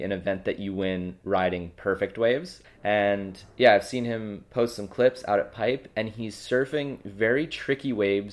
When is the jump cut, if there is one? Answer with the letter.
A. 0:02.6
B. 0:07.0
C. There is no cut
A